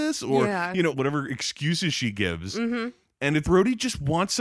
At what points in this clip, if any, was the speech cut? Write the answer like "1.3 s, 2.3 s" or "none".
0.9 s, 3.4 s